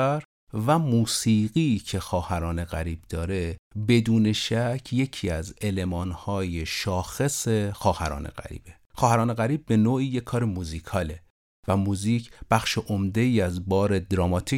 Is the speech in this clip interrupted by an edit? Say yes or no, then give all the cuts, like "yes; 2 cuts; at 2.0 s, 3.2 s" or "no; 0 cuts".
yes; 1 cut; at 8.8 s